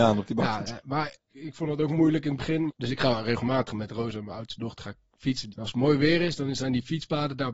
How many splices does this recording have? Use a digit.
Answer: 3